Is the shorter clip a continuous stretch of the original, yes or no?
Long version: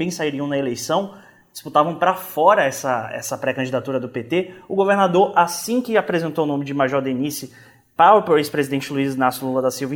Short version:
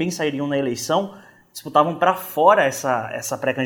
yes